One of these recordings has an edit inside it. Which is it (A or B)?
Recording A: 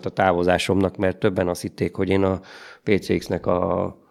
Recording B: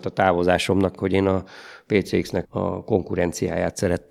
B